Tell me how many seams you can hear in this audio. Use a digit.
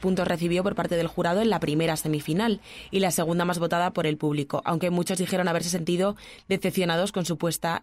0